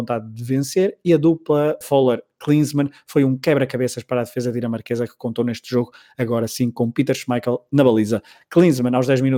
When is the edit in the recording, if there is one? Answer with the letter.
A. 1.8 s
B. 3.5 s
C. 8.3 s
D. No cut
A